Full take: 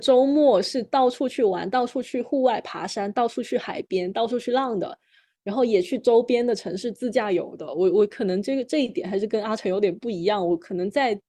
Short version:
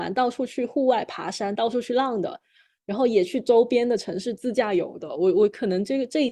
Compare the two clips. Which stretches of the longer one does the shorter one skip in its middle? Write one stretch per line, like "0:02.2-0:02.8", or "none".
0:03.1-0:04.1